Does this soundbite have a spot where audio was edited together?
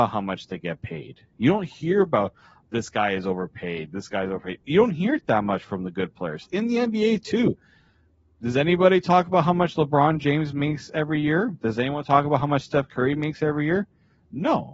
no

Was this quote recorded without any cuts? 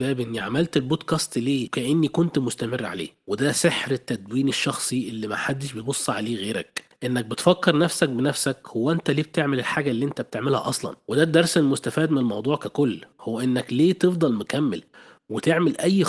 yes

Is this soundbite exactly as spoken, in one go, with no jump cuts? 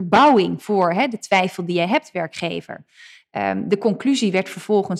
yes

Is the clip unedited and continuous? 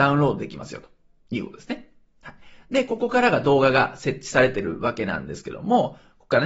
yes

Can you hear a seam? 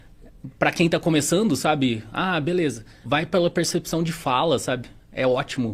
yes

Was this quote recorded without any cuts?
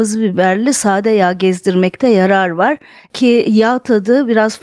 yes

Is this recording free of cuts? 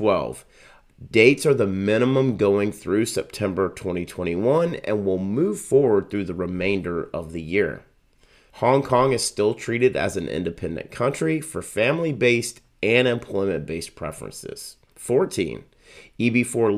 no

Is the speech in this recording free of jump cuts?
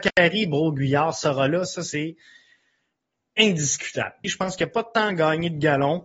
no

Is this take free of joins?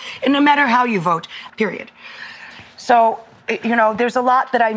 no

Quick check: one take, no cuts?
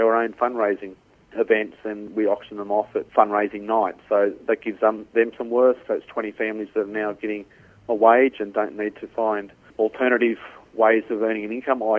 no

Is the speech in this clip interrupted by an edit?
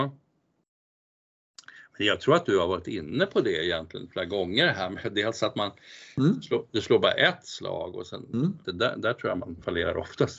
yes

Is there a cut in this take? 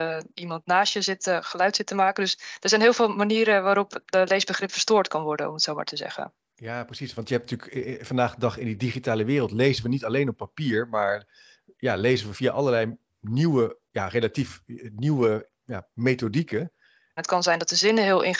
yes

